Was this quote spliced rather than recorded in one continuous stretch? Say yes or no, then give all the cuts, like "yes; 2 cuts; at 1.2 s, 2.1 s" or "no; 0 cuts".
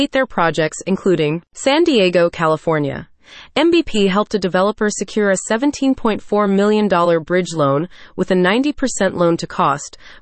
no; 0 cuts